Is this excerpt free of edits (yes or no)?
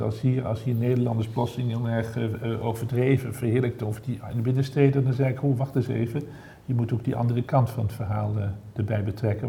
yes